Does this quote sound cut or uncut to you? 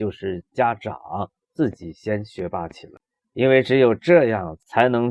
uncut